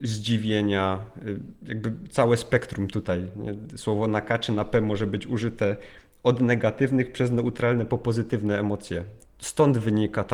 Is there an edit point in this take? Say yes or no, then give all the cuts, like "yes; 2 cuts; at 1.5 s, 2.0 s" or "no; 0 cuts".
yes; 1 cut; at 9.3 s